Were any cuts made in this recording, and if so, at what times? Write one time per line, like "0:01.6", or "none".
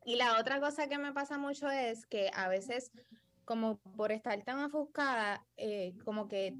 none